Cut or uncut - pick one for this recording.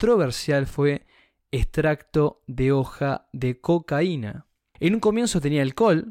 cut